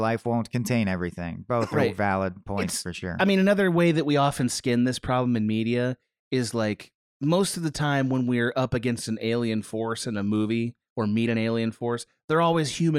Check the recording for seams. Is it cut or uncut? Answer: uncut